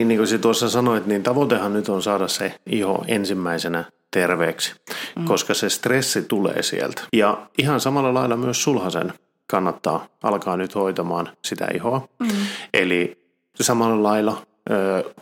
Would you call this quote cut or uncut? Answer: cut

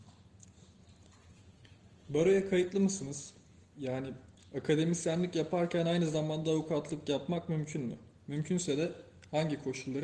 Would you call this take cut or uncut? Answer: uncut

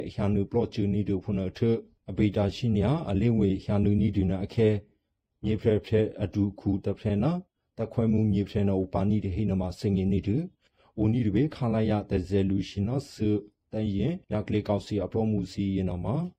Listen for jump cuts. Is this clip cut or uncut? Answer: uncut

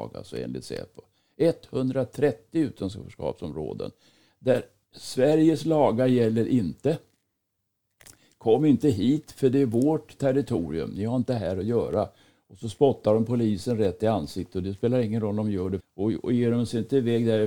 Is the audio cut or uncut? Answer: cut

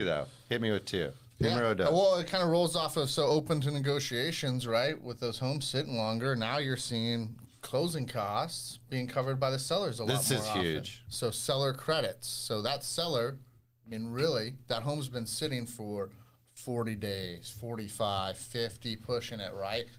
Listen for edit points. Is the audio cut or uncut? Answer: uncut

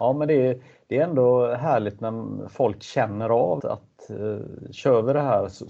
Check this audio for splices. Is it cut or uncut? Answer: cut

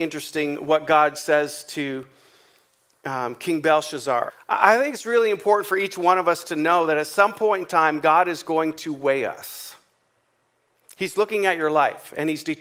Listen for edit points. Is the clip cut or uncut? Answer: cut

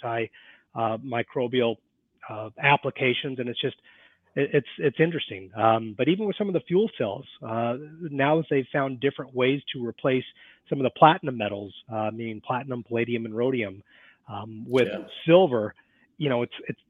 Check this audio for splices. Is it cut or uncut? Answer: uncut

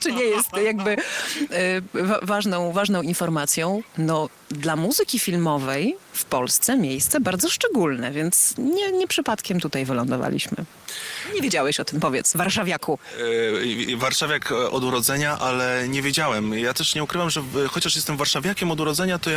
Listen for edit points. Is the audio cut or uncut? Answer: uncut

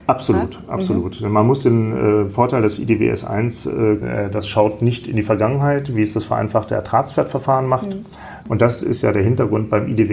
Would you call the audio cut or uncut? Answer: cut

